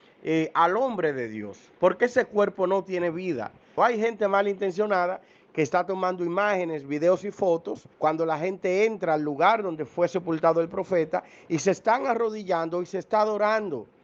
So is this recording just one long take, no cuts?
no; 2 cuts; at 3.8 s, 7.9 s

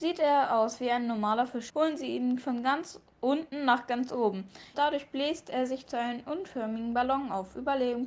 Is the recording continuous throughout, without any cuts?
no; 2 cuts; at 1.7 s, 4.7 s

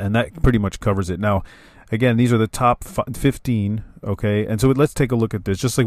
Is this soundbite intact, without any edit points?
yes; 0 cuts

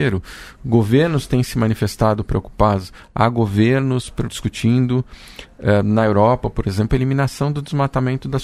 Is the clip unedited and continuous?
no; 1 cut; at 4.3 s

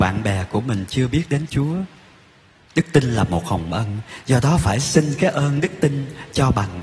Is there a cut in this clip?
no; 0 cuts

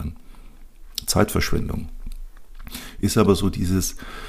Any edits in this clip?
no; 0 cuts

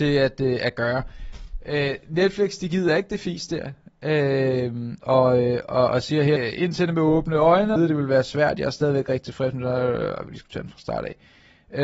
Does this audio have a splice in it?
yes; 3 cuts; at 6.4 s, 7.8 s, 10.3 s

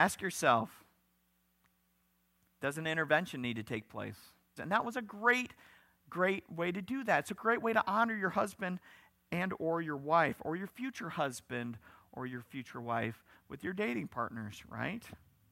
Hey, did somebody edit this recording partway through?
yes; 1 cut; at 4.6 s

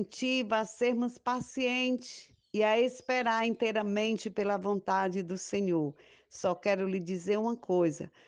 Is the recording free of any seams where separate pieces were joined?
yes; 0 cuts

